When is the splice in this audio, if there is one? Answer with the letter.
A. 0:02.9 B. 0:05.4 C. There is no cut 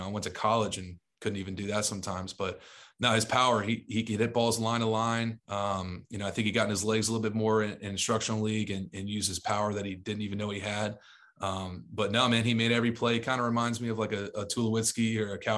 B